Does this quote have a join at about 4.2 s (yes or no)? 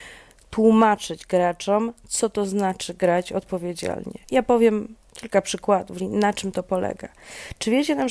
yes